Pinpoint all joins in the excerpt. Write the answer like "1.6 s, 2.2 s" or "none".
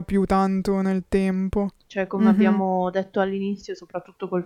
1.8 s